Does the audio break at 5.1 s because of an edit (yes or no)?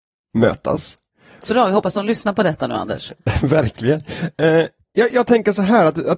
yes